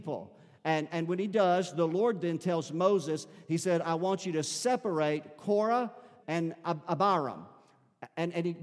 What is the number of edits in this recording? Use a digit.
1